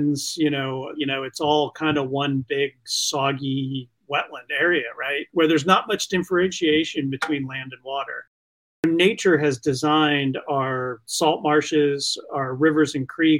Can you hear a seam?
yes; 1 cut; at 1.0 s

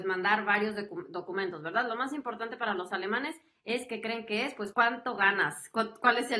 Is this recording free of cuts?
no; 1 cut; at 4.7 s

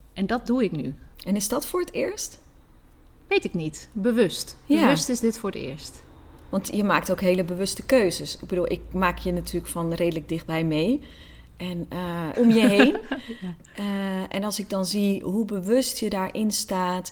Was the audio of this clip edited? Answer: yes; 2 cuts; at 1.1 s, 12.3 s

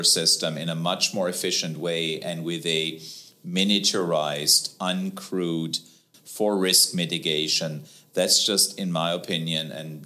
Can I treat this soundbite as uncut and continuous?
no; 1 cut; at 6.1 s

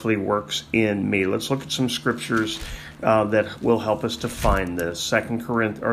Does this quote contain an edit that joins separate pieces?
no; 0 cuts

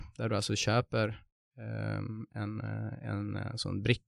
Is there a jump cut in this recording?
no; 0 cuts

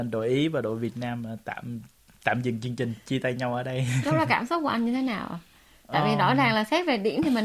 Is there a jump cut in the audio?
no; 0 cuts

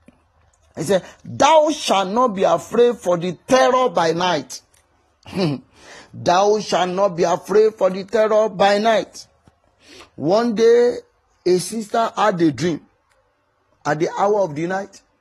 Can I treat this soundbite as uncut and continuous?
yes; 0 cuts

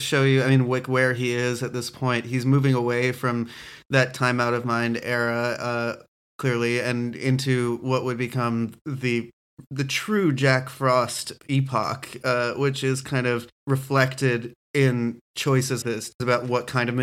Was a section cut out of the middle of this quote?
yes; 2 cuts; at 13.6 s, 15.8 s

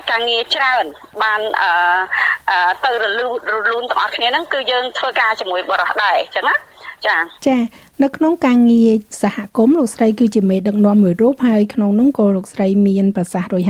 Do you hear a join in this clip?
yes; 1 cut; at 7.4 s

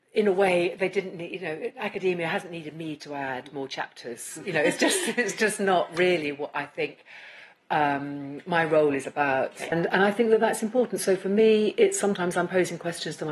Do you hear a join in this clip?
yes; 1 cut; at 9.7 s

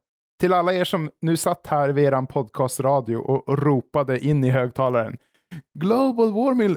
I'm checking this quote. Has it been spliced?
yes; 1 cut; at 5.7 s

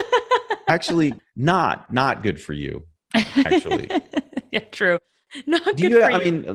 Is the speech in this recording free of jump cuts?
yes; 0 cuts

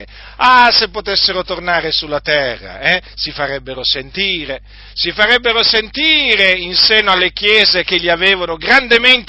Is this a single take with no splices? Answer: yes; 0 cuts

